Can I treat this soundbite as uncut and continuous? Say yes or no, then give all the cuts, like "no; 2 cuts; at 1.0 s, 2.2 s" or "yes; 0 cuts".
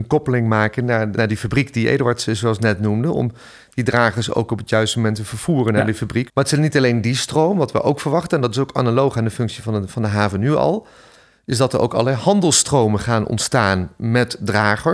no; 2 cuts; at 1.1 s, 6.3 s